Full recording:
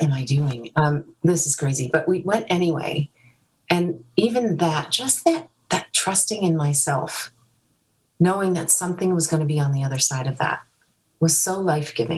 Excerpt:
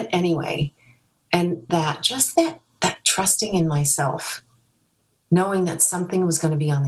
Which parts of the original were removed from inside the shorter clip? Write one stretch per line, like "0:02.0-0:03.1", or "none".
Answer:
0:04.1-0:04.6